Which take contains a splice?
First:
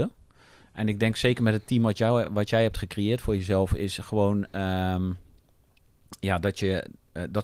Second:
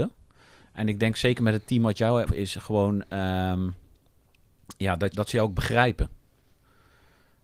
second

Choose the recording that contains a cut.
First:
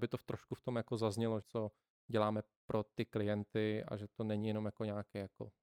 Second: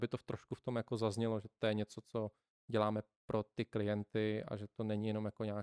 first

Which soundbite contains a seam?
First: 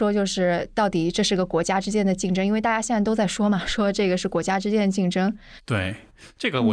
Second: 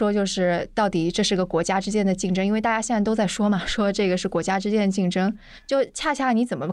first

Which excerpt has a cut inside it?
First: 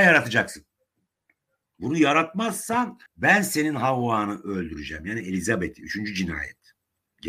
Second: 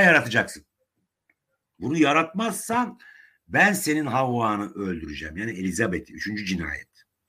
first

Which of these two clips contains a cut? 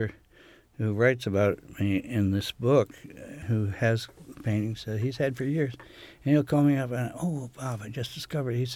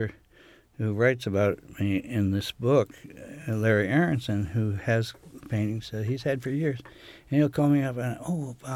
first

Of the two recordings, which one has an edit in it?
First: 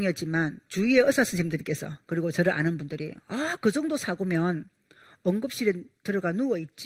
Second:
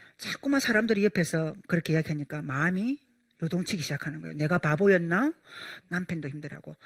second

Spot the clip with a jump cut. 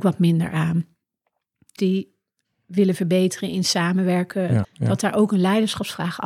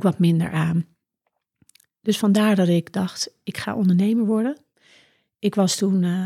first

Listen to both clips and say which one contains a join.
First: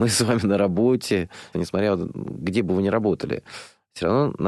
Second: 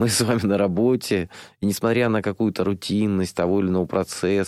first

